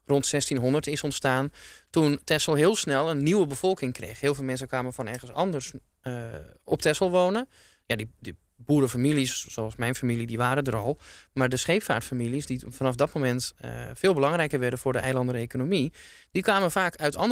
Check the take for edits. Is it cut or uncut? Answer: uncut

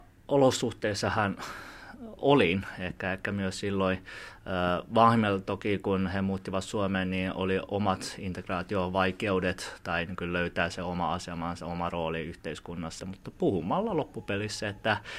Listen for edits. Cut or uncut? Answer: cut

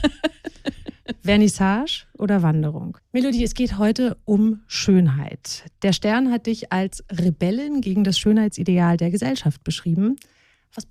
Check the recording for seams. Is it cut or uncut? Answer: cut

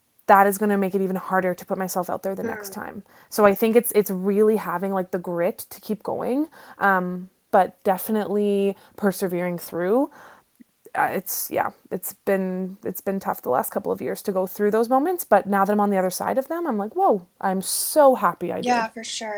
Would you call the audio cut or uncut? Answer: cut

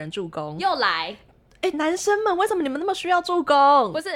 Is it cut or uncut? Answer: cut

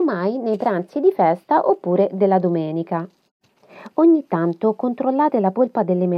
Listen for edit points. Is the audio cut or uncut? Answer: uncut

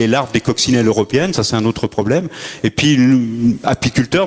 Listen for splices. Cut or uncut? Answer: uncut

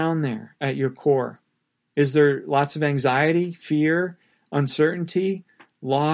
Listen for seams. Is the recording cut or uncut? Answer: uncut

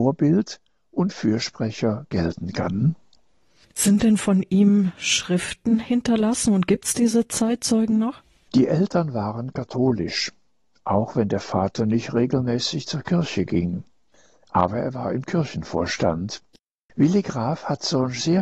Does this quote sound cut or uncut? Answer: cut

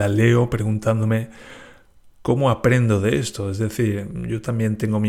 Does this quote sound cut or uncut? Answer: uncut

